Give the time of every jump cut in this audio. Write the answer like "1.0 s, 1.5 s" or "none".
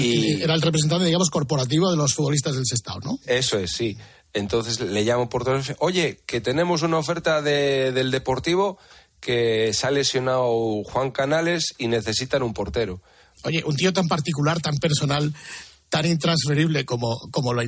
13.3 s